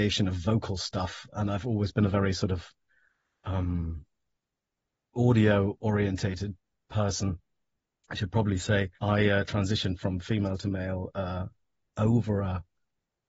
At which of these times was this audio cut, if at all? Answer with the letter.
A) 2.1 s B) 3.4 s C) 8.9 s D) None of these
C